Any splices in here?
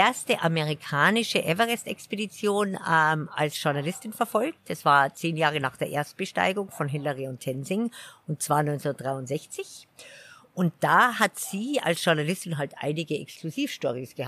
no; 0 cuts

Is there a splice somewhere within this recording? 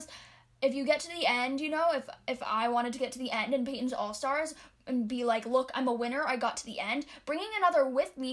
no; 0 cuts

